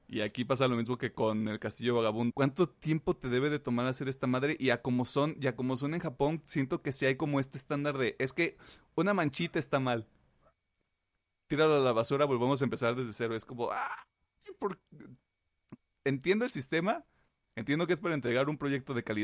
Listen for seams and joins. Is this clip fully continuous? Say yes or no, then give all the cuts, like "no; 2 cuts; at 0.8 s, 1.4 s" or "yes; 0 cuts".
no; 1 cut; at 2.3 s